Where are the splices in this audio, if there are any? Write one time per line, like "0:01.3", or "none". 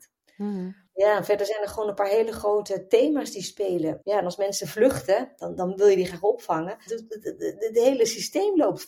0:04.0
0:06.9